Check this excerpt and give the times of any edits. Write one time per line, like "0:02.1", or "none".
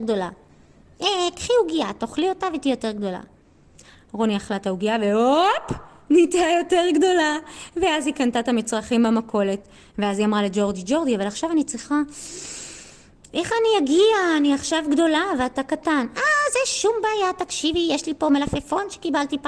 none